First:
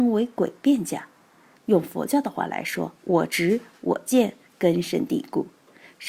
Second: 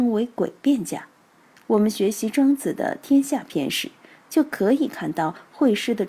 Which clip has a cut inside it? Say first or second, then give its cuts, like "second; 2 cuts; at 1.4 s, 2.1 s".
first; 2 cuts; at 1.5 s, 3.0 s